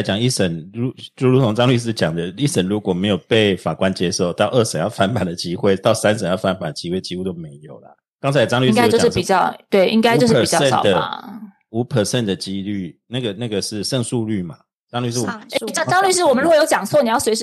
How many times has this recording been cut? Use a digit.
0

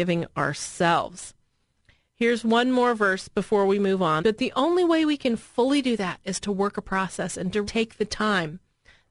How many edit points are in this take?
2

